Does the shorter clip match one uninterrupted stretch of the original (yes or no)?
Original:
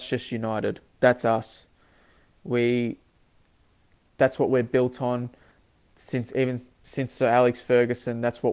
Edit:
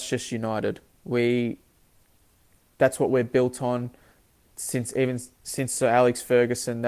no